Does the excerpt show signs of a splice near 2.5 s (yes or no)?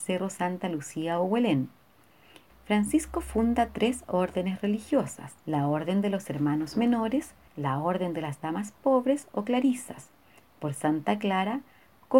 yes